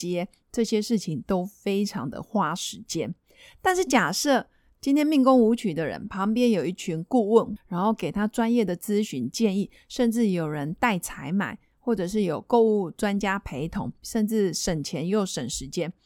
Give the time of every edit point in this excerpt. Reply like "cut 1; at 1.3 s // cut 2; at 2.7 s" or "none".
cut 1; at 7.6 s // cut 2; at 14.0 s